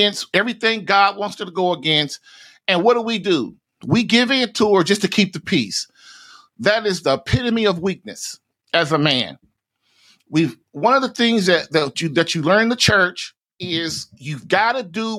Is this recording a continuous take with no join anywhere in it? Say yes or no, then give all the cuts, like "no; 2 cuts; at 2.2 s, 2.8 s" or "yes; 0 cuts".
yes; 0 cuts